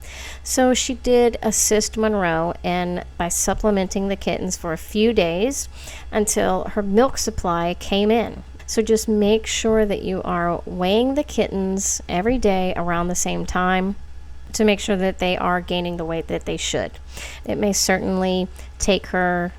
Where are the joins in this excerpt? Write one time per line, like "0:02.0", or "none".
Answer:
0:08.6
0:17.4